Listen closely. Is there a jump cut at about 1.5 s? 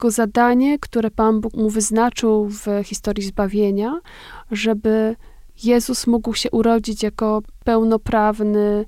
yes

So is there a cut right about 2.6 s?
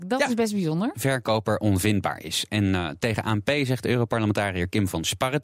no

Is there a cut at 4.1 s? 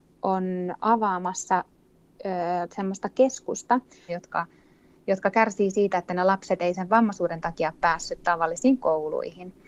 yes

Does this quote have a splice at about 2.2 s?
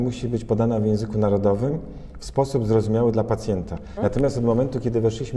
no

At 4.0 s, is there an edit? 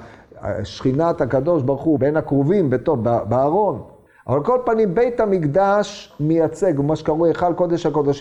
no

